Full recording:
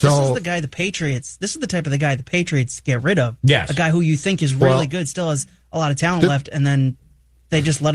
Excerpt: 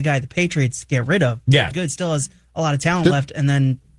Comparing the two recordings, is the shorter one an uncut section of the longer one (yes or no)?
no